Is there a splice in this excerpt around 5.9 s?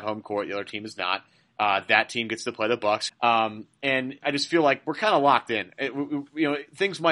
no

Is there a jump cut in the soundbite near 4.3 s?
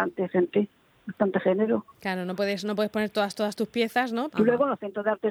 yes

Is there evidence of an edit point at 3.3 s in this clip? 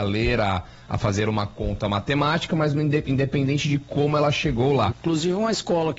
no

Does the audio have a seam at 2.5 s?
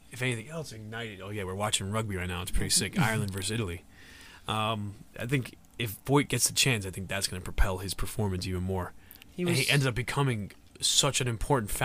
no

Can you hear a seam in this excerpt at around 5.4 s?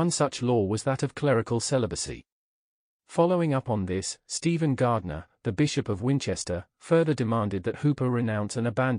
no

